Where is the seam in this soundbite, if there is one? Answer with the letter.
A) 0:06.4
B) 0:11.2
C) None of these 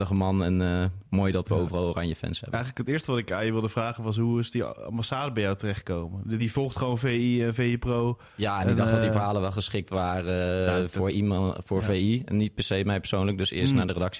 C